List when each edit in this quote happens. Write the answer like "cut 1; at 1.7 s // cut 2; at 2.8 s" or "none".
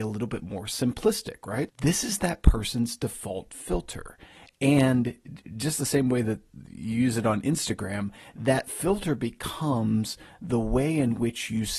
cut 1; at 1.7 s

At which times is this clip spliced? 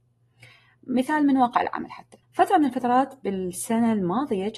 cut 1; at 2.2 s

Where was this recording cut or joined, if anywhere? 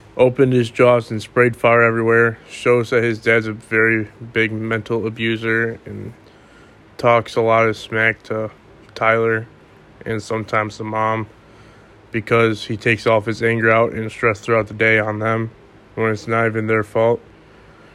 none

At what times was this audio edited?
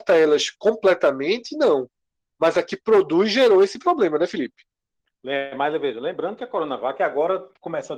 none

